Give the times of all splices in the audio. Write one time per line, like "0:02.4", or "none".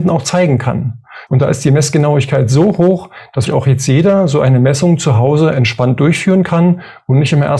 0:01.3
0:03.5